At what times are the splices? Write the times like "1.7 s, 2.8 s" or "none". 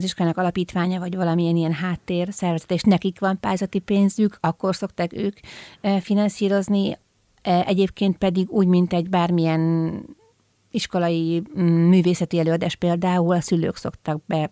none